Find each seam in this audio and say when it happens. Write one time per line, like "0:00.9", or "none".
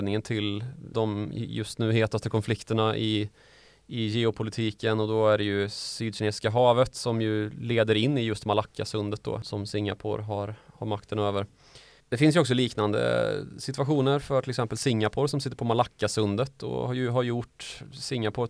0:12.0